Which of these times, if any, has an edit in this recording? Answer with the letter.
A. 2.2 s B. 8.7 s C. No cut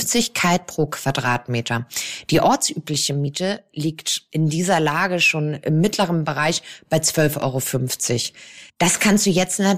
B